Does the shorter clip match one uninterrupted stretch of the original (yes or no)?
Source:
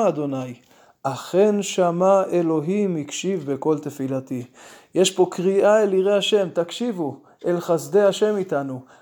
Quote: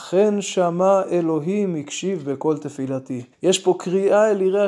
no